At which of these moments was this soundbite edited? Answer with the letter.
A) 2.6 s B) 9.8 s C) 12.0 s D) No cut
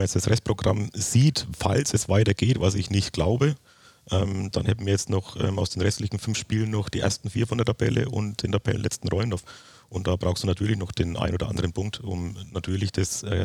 D